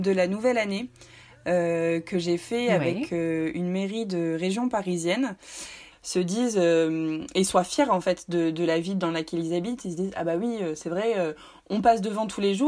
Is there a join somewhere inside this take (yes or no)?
yes